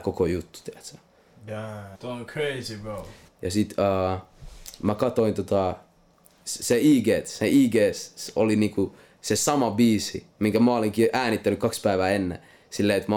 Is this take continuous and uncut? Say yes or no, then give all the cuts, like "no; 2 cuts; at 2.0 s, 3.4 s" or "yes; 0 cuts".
no; 2 cuts; at 1.9 s, 3.3 s